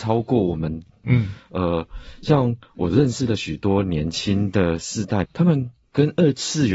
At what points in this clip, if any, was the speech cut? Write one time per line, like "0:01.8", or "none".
0:01.0
0:05.2